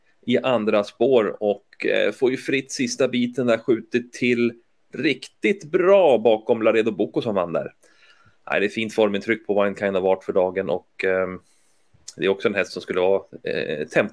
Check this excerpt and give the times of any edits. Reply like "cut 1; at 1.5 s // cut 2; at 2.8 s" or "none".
none